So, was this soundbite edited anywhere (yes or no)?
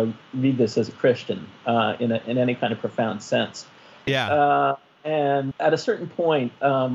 yes